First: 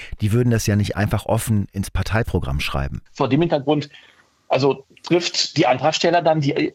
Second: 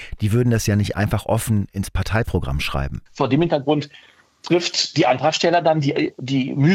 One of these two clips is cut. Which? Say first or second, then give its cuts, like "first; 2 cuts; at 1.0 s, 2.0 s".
second; 1 cut; at 4.4 s